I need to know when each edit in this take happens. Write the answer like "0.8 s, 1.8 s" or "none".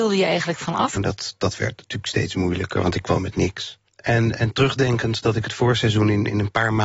1.0 s, 3.9 s